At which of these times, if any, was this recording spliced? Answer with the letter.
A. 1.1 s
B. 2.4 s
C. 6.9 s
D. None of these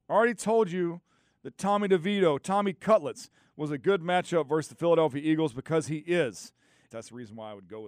C